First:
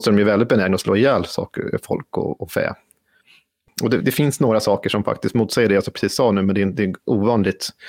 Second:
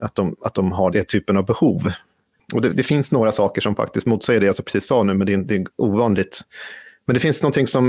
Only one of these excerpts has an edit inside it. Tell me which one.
second; 2 cuts; at 0.9 s, 2.4 s

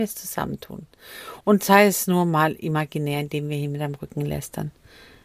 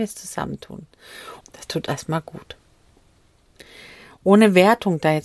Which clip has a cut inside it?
second; 1 cut; at 1.4 s

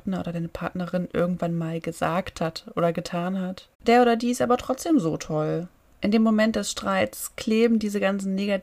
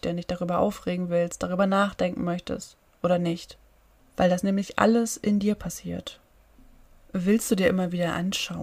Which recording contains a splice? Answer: first; 1 cut; at 3.7 s

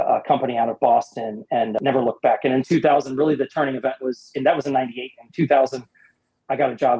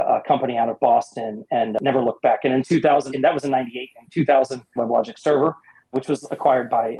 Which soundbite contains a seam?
second; 2 cuts; at 3.1 s, 4.8 s

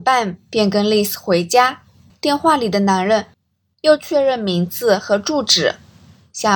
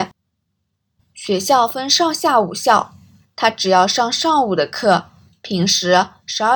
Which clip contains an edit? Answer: first; 1 cut; at 2.1 s

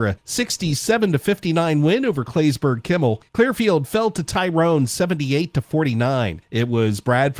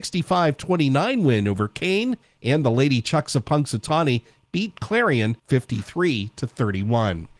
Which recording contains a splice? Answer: first; 1 cut; at 3.3 s

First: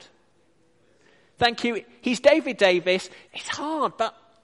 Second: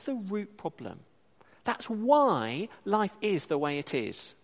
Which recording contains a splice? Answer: first; 1 cut; at 3.3 s

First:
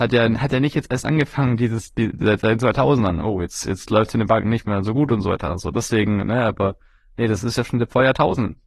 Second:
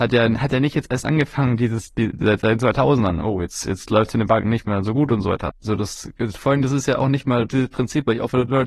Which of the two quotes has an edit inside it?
second; 2 cuts; at 5.5 s, 7.5 s

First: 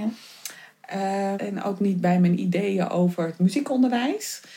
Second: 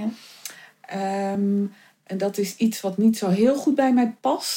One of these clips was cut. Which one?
first; 1 cut; at 1.3 s

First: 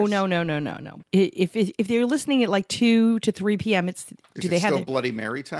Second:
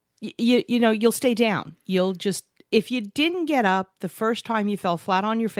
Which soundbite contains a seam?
first; 1 cut; at 1.0 s

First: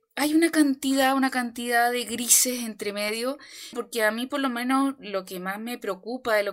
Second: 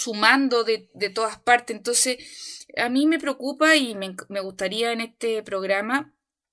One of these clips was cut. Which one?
first; 1 cut; at 3.7 s

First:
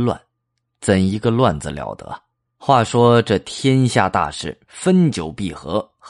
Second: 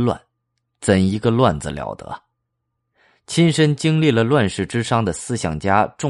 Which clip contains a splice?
first; 1 cut; at 2.5 s

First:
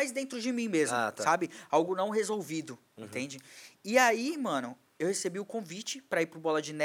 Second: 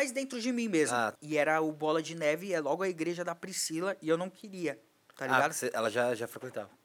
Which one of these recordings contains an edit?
second; 1 cut; at 1.2 s

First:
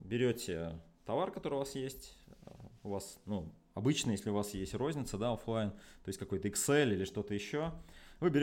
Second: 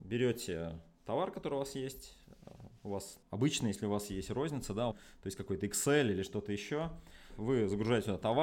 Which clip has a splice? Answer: second; 3 cuts; at 3.2 s, 4.9 s, 7.3 s

